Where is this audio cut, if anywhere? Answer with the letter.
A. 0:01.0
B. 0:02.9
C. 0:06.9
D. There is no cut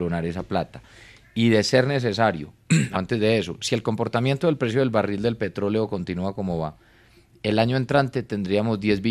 B